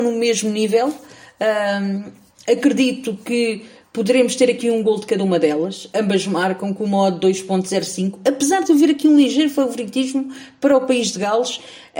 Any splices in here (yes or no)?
no